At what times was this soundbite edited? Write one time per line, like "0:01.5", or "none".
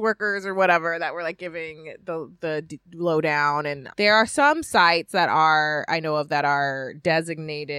0:03.9